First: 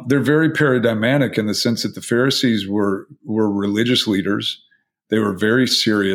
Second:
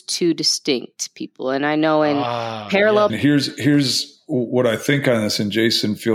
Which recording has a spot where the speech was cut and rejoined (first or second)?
second